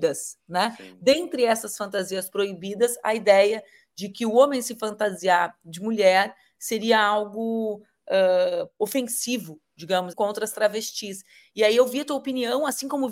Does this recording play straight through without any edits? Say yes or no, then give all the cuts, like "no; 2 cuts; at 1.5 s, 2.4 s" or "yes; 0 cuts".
no; 1 cut; at 10.1 s